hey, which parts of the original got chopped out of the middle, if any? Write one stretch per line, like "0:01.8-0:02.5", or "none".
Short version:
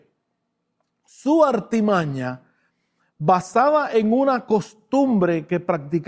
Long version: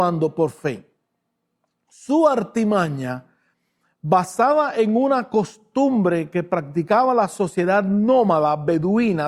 none